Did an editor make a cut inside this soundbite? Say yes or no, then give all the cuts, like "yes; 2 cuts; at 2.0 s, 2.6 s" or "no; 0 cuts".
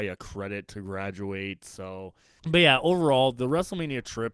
yes; 1 cut; at 2.4 s